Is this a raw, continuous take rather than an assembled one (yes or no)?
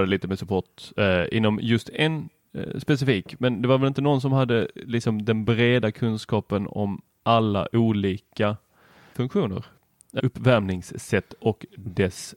no